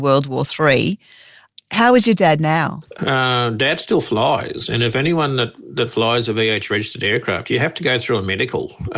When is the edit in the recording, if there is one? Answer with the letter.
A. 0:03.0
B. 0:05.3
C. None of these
A